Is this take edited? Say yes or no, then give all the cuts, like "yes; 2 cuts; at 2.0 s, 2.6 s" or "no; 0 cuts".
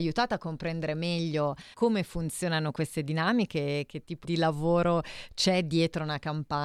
yes; 2 cuts; at 1.7 s, 4.2 s